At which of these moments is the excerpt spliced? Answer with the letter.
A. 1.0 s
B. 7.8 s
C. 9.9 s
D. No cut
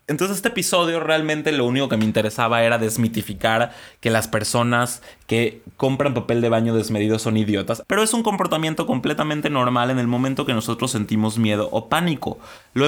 B